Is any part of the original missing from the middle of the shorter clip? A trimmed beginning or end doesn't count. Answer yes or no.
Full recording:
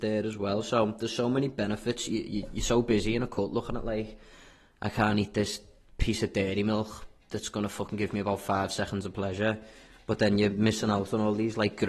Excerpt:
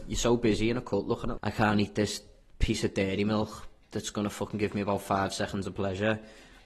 yes